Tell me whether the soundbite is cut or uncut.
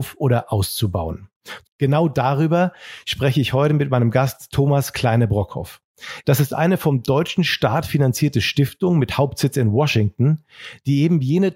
cut